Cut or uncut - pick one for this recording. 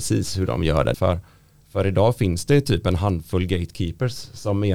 cut